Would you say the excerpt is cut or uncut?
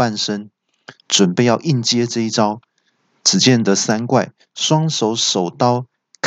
uncut